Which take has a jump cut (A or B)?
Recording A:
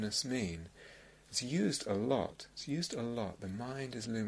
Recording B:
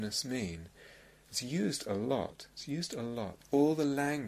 B